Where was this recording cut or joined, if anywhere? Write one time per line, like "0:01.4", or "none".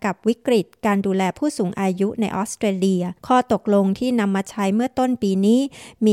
0:03.2